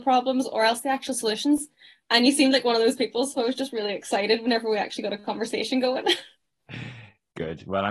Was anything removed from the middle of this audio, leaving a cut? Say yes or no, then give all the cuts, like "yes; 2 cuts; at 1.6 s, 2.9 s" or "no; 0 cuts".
no; 0 cuts